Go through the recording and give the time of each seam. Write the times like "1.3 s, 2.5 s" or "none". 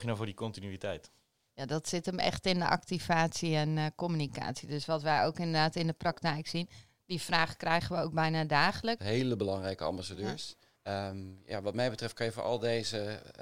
9.0 s, 10.8 s